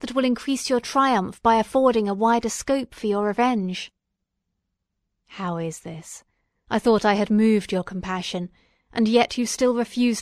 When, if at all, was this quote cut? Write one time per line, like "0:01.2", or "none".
none